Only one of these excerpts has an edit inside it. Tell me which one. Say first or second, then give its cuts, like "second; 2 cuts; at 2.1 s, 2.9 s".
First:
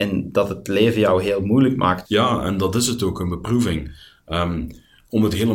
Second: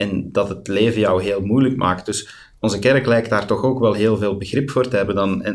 first; 1 cut; at 2.0 s